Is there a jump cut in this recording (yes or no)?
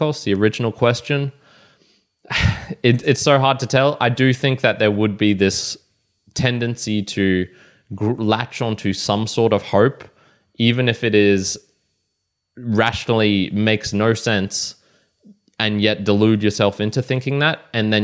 yes